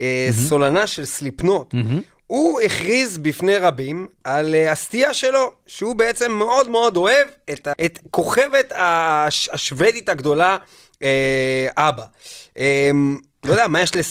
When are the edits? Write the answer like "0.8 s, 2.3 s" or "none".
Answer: 7.7 s